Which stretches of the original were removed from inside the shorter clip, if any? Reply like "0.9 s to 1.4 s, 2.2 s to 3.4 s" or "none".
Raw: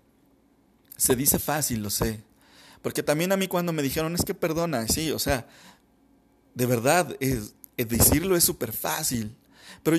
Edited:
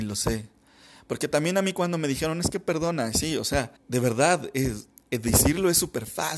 5.5 s to 6.4 s